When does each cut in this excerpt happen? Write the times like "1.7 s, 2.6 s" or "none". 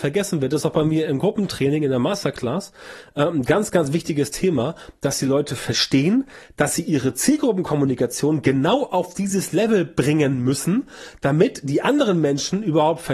none